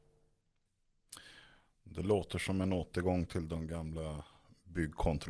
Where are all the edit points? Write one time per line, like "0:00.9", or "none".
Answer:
none